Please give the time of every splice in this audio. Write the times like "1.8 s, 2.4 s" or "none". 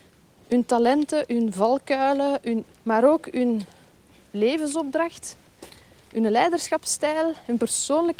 2.7 s, 6.0 s